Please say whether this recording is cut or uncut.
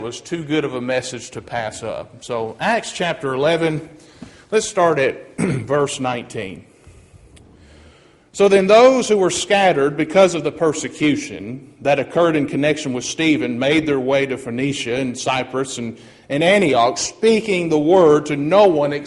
uncut